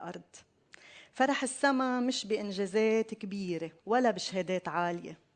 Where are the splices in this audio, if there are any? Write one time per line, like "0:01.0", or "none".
0:03.8